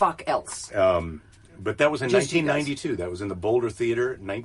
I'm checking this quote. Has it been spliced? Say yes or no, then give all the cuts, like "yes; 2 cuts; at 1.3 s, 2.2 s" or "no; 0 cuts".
no; 0 cuts